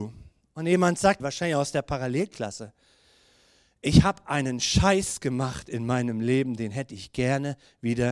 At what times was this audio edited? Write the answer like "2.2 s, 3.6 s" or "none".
1.2 s

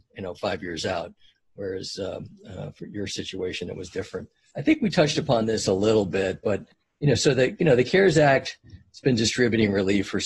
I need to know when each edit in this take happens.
none

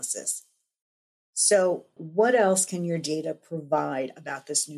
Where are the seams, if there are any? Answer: 2.0 s

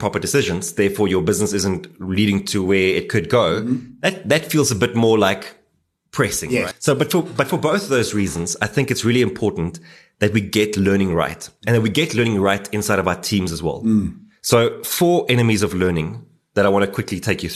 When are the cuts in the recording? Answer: 6.7 s

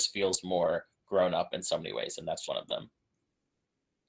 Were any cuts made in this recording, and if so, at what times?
2.5 s

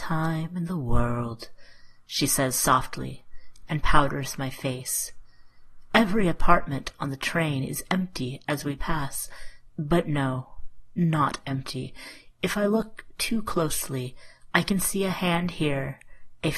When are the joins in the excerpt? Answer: none

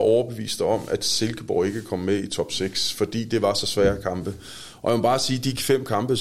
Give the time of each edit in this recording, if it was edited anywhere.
none

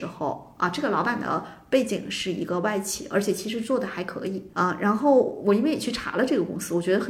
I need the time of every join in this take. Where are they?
4.5 s

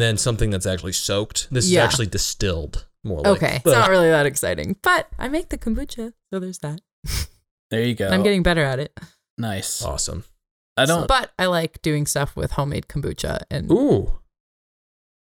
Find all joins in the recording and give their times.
3.6 s, 11.0 s

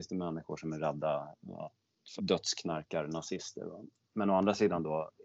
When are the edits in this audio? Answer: 2.2 s, 4.0 s

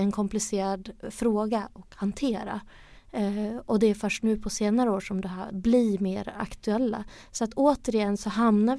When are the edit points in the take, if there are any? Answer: 3.0 s, 5.5 s

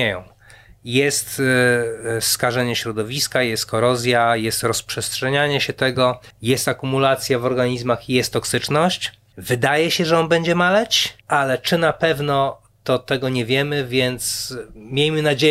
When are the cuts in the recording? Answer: 6.3 s, 9.3 s, 11.2 s

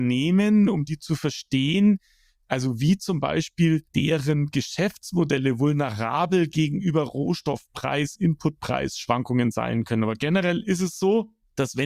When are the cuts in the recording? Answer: none

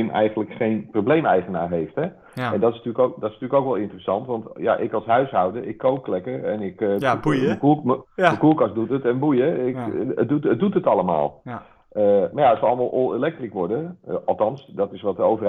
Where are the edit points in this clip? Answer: none

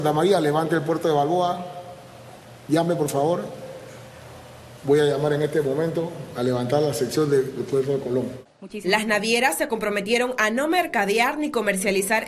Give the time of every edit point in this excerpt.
none

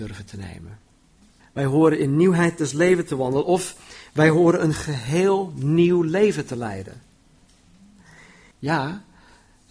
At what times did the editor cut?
1.4 s, 8.5 s

